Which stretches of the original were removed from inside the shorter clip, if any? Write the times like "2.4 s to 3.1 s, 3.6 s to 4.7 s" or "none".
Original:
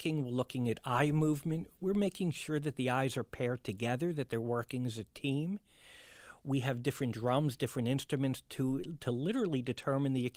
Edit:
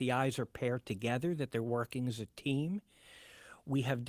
none